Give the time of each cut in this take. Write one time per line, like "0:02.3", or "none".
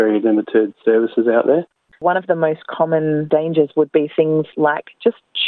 0:01.9